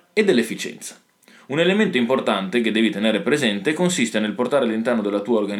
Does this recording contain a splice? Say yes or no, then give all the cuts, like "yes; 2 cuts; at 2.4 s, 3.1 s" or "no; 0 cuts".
no; 0 cuts